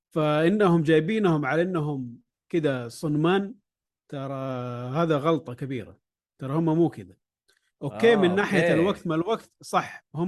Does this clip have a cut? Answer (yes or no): no